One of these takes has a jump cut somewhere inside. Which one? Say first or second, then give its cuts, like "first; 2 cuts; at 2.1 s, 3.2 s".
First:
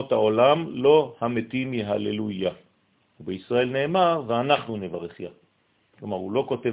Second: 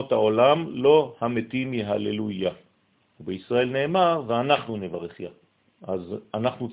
second; 1 cut; at 5.6 s